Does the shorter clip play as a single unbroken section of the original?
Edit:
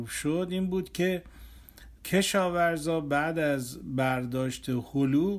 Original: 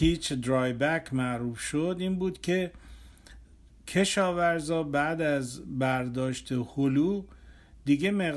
no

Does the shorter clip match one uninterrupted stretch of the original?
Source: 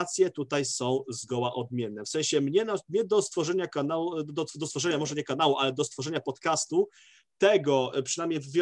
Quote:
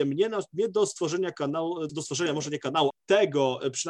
no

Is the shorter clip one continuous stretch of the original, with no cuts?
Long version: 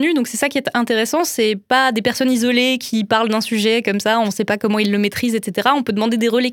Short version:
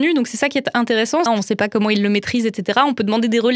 no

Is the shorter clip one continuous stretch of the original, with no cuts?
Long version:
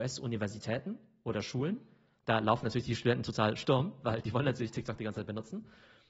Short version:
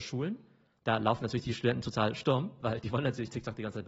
yes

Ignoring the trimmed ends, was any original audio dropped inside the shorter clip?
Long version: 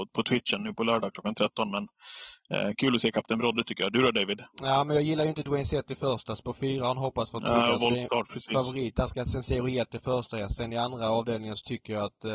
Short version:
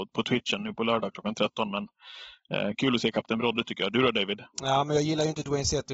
no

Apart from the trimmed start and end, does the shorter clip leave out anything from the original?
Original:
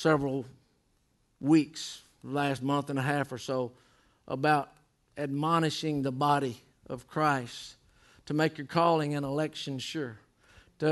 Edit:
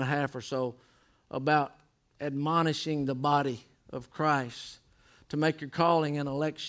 no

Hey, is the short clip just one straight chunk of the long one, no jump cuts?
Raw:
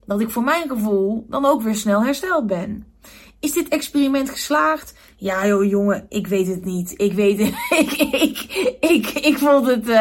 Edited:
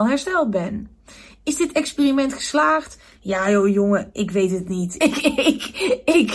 no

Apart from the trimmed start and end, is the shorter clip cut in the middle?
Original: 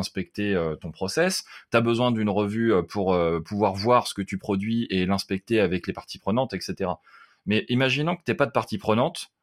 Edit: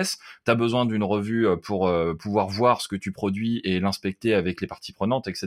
no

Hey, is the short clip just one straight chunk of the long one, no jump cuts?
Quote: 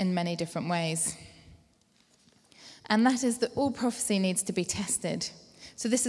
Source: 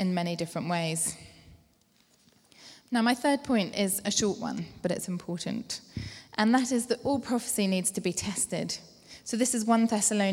no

